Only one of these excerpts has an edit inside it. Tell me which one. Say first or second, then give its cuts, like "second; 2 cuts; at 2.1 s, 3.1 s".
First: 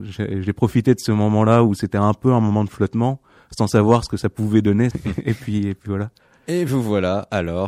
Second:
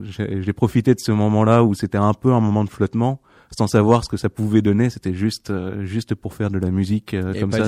first; 1 cut; at 4.9 s